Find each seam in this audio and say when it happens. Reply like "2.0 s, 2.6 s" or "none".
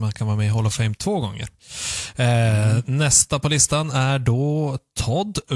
none